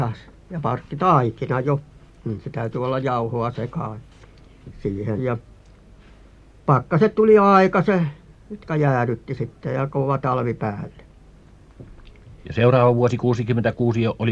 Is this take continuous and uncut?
no; 1 cut; at 5.2 s

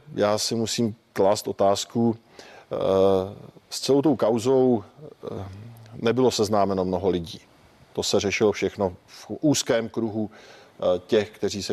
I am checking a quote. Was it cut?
no; 0 cuts

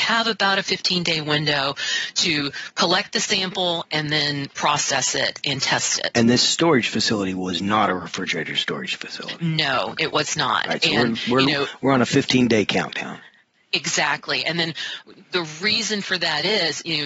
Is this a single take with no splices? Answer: yes; 0 cuts

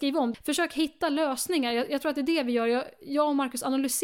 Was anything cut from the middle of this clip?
no; 0 cuts

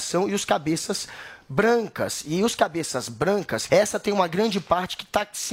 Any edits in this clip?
yes; 1 cut; at 3.7 s

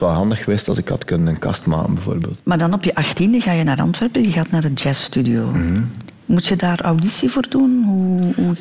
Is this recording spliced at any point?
no; 0 cuts

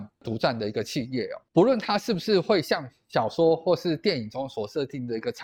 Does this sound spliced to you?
yes; 1 cut; at 1.5 s

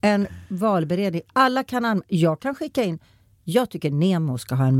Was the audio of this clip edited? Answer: no; 0 cuts

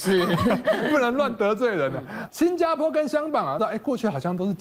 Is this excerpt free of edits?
no; 2 cuts; at 2.3 s, 3.6 s

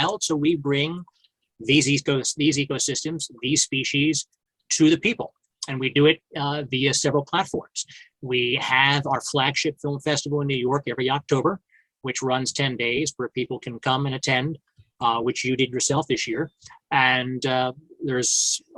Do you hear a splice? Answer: no; 0 cuts

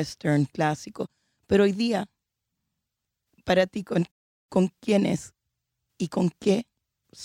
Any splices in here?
no; 0 cuts

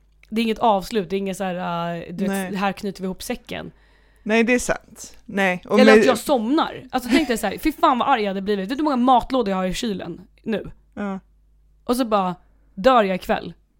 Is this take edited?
no; 0 cuts

